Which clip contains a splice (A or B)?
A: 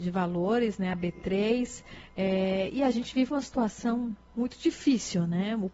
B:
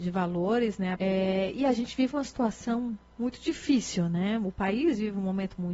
B